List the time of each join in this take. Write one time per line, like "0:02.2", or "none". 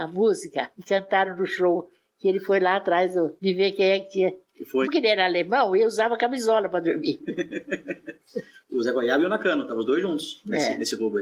0:04.8

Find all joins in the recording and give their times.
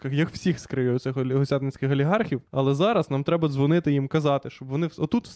0:02.5

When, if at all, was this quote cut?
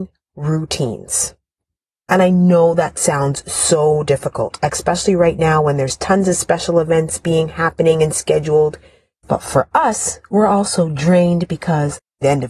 0:09.2

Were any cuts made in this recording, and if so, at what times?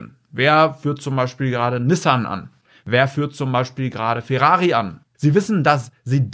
0:05.1

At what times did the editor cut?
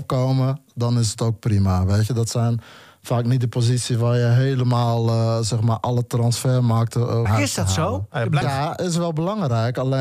0:07.3
0:08.4

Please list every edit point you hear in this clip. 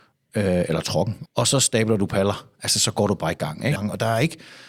0:01.3
0:03.8

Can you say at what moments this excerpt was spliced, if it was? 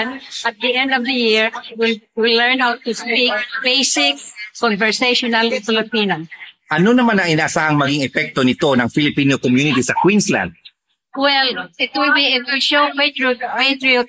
none

